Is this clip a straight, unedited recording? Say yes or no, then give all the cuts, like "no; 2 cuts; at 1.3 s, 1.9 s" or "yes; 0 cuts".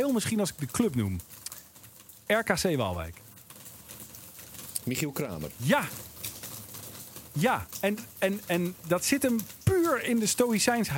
yes; 0 cuts